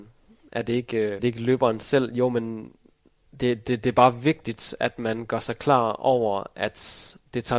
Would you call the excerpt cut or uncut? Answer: cut